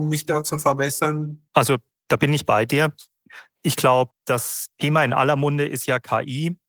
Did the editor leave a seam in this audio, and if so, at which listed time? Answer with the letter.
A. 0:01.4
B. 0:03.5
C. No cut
A